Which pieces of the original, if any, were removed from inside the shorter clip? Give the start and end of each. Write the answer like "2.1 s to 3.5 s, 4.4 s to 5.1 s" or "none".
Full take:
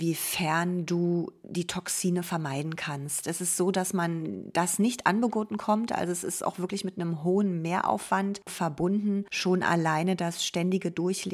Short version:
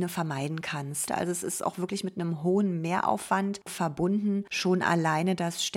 3.2 s to 5.9 s